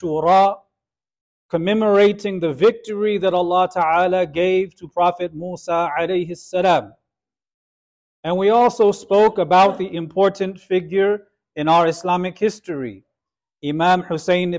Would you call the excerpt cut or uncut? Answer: uncut